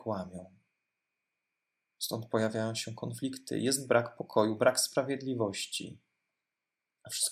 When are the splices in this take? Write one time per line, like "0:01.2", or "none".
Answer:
none